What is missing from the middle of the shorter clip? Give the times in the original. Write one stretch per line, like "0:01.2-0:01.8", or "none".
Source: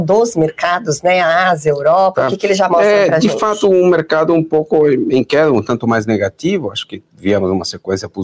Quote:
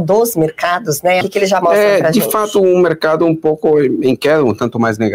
0:01.2-0:02.3